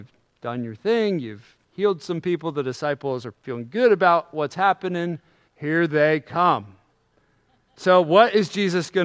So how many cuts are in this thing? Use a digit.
2